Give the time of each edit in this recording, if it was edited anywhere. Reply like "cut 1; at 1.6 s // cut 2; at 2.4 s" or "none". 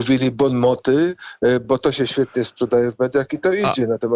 none